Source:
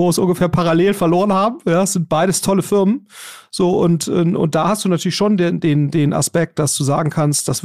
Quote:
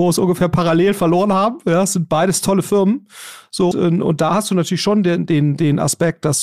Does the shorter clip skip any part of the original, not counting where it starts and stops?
yes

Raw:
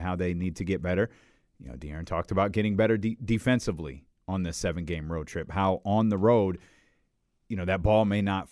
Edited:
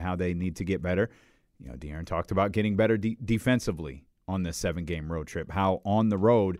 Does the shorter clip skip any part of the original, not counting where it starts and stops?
no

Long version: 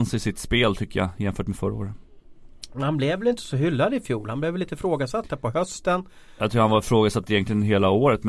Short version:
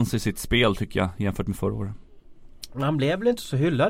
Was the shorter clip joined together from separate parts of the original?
no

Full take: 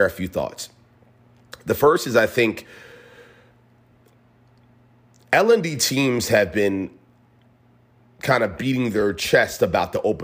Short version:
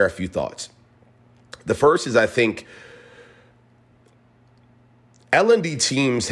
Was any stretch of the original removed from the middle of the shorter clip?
no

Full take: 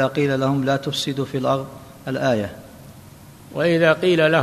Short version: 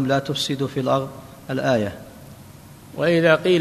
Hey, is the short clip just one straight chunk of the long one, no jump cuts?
yes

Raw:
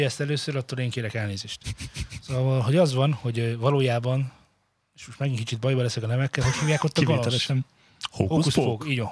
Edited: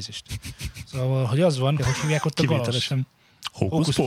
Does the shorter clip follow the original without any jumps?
no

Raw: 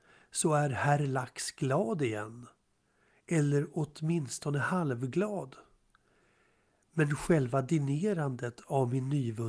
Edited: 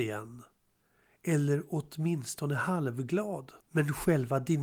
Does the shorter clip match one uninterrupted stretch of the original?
no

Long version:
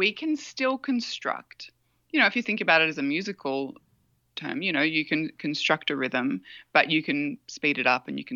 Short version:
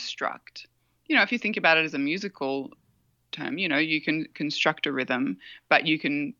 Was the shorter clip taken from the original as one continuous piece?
yes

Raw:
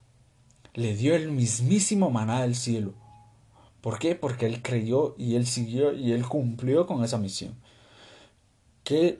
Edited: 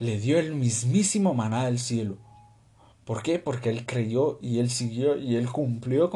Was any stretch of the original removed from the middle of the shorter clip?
no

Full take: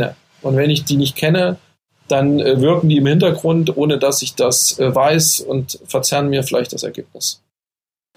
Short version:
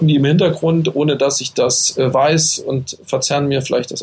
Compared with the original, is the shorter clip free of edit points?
yes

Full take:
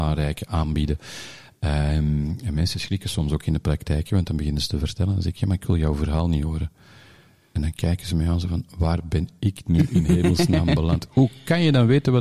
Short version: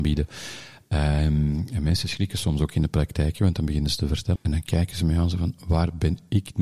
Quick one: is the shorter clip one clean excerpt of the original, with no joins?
no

